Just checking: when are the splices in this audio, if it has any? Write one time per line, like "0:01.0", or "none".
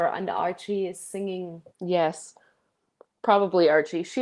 0:01.7